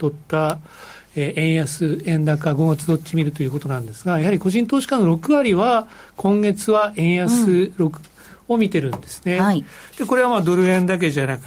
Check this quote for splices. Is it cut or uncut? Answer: uncut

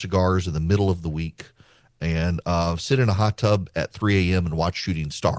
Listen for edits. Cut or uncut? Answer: uncut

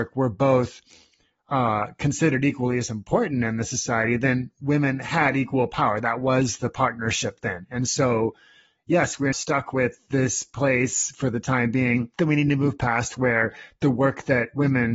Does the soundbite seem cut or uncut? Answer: cut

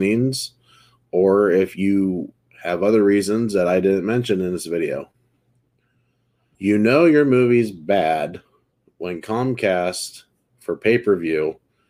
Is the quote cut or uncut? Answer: cut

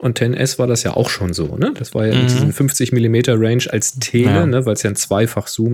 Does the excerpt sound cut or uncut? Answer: uncut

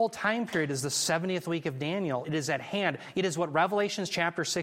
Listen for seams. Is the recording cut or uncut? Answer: cut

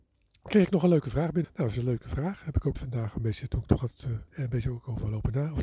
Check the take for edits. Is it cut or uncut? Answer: cut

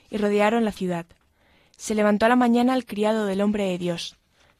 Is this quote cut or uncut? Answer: uncut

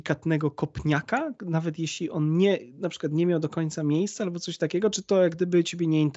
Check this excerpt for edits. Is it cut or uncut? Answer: uncut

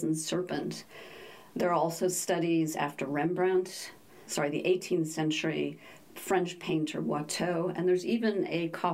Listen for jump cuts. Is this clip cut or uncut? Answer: cut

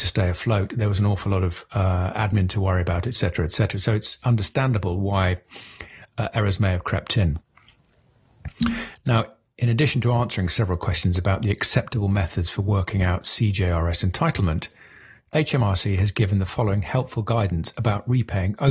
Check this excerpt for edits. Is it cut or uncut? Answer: uncut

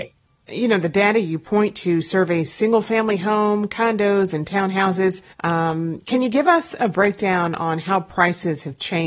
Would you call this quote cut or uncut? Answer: cut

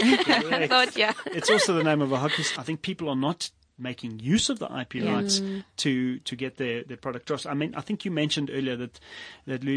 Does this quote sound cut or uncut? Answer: cut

